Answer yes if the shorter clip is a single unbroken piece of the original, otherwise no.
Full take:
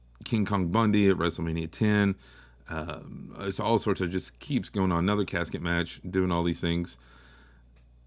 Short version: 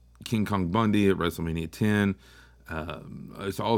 yes